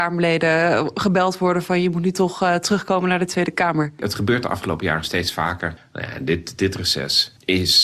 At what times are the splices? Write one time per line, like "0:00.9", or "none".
0:05.8